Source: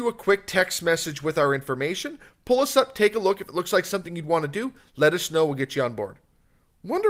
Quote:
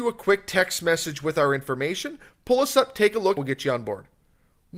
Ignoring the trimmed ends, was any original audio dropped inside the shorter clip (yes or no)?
yes